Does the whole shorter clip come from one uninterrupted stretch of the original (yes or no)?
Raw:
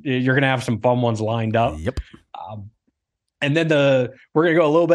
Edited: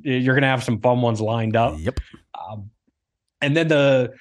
yes